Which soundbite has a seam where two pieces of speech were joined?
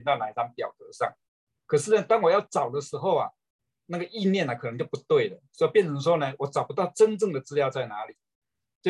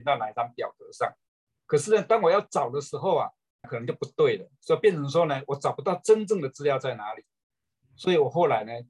second; 2 cuts; at 3.6 s, 7.8 s

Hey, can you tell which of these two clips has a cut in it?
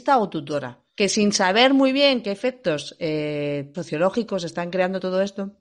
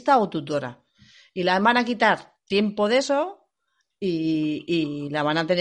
first; 2 cuts; at 0.9 s, 3.7 s

